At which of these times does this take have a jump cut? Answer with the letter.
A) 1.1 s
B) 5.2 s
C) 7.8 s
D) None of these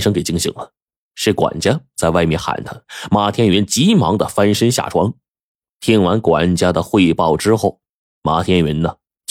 D